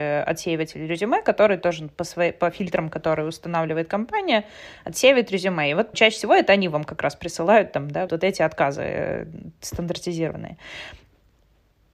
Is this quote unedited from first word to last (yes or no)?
no